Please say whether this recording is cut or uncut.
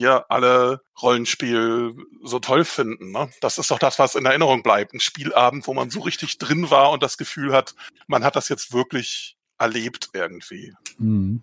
uncut